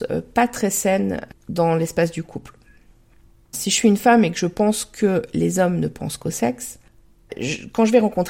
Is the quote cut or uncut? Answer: cut